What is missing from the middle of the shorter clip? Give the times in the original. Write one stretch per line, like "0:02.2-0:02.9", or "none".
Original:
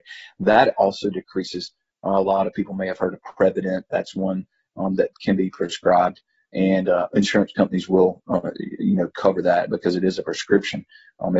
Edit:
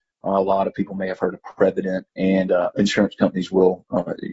0:03.9-0:06.5